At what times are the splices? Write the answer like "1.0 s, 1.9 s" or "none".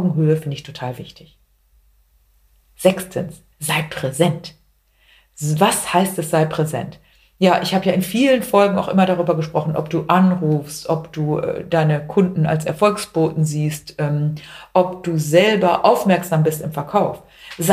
3.5 s